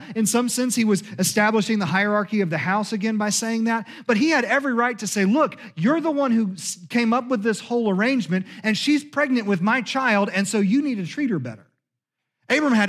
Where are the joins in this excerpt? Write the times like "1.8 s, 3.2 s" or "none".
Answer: none